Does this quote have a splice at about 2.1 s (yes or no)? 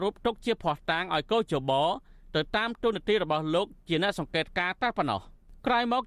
no